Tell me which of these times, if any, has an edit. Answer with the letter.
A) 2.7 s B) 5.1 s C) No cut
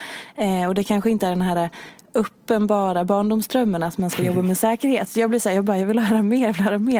B